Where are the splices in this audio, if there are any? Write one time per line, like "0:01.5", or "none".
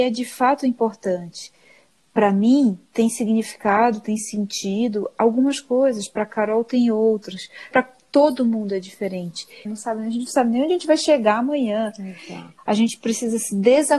0:07.7
0:09.7
0:12.6